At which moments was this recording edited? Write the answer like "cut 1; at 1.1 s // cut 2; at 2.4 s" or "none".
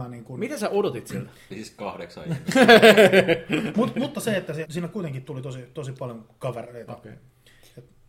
cut 1; at 1.5 s // cut 2; at 4.6 s